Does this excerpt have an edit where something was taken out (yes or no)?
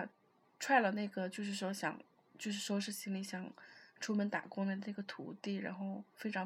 no